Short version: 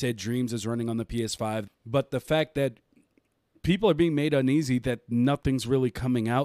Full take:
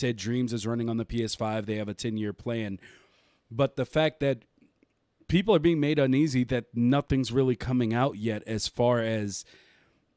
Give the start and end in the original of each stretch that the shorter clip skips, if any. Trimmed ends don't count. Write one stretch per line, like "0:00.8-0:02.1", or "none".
0:01.7-0:03.3

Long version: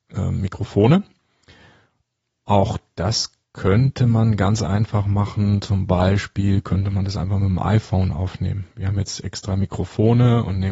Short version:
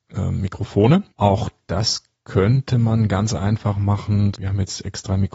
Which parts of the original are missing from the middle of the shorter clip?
0:01.1-0:02.4
0:05.6-0:08.7

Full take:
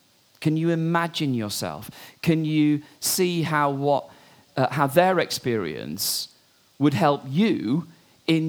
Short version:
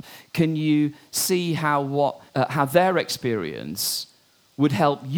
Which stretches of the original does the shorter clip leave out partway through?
0:04.2-0:04.5

